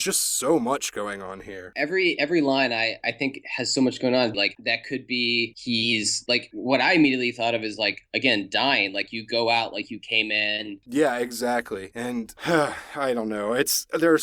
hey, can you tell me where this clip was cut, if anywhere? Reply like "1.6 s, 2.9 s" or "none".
4.3 s, 10.8 s